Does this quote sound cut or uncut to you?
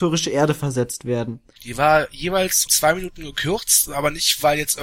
cut